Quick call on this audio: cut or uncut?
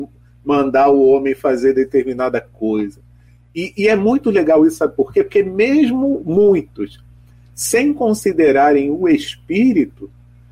uncut